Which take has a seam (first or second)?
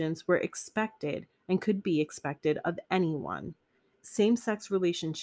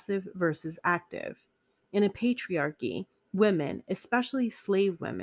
first